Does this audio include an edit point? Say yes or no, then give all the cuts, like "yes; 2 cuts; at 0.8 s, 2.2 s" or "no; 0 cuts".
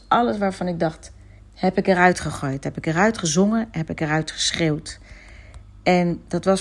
yes; 1 cut; at 1.4 s